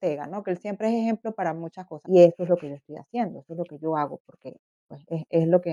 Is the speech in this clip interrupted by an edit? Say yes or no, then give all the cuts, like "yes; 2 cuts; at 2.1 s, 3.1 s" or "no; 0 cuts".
yes; 1 cut; at 2.0 s